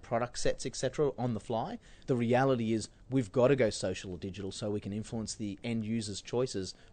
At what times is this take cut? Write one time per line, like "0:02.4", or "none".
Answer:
none